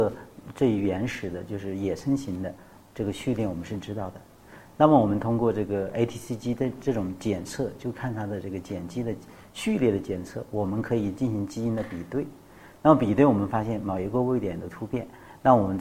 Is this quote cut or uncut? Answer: uncut